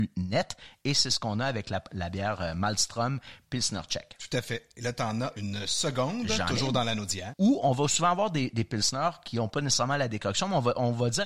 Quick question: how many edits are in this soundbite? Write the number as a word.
one